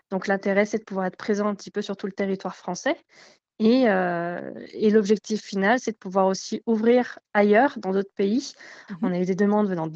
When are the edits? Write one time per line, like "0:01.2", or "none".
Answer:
0:08.9